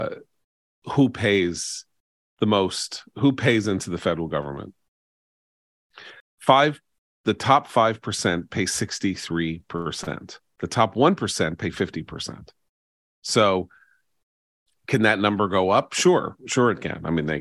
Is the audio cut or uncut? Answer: cut